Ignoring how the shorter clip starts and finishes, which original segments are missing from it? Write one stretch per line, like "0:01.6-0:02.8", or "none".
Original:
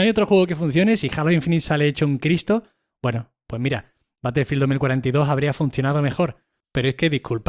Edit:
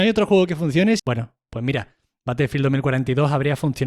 0:01.0-0:03.0

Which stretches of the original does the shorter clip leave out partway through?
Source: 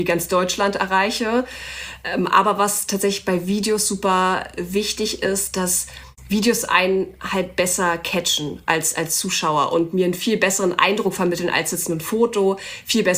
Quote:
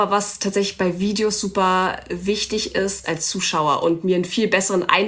0:05.5-0:08.9

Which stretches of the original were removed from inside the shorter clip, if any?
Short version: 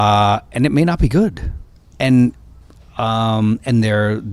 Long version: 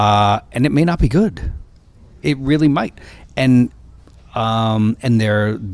0:01.9-0:03.3

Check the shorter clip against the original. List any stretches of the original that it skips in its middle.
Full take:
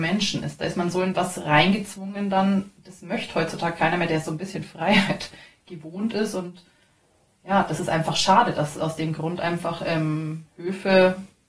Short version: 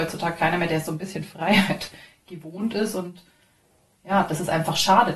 none

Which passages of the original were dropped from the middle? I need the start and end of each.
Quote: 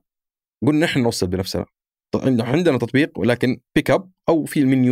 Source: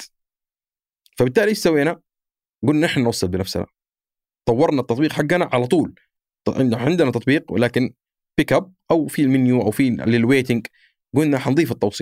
0:04.0-0:06.4
0:08.0-0:08.3

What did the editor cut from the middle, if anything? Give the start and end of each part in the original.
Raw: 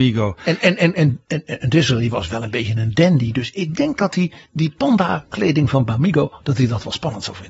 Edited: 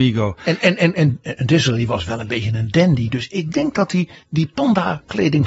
0:01.2-0:01.4

